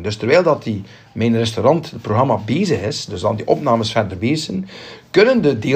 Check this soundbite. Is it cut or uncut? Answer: uncut